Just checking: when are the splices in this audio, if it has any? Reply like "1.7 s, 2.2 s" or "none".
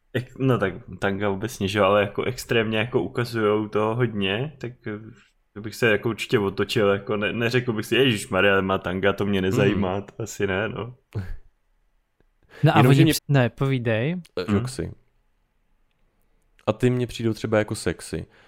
13.2 s, 14.5 s